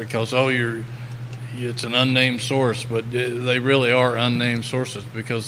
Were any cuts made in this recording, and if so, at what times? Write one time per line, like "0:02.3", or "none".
none